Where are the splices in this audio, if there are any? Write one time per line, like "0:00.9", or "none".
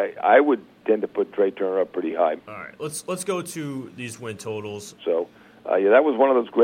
0:02.4
0:05.0